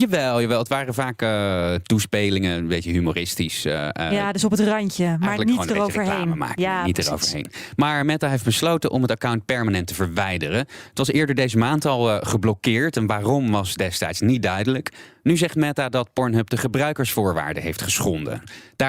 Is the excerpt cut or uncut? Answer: uncut